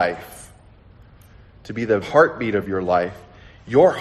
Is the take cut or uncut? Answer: cut